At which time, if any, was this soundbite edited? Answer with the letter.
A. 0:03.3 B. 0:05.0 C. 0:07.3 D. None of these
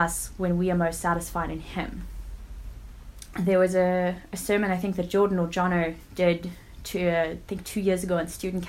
A